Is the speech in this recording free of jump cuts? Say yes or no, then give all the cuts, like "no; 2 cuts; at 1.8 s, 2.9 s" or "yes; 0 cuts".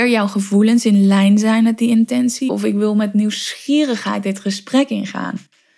no; 1 cut; at 2.5 s